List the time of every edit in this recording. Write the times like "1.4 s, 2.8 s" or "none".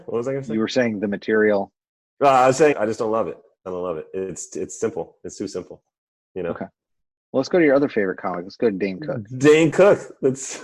2.7 s

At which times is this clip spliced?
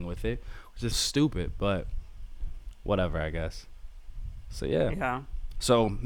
0.9 s

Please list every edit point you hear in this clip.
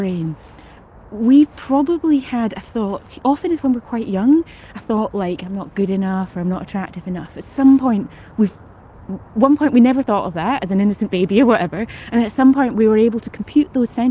6.3 s

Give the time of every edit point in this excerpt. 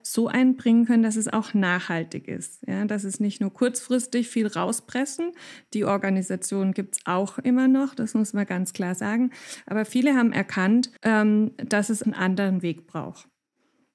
11.0 s, 12.0 s

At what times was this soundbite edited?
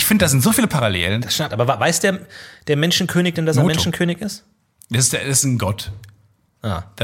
1.5 s

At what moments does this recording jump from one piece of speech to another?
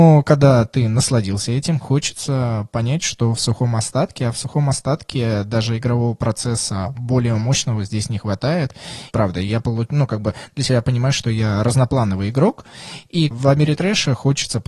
1.8 s, 9.1 s, 13.3 s

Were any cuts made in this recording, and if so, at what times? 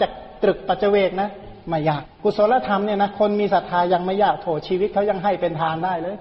2.0 s

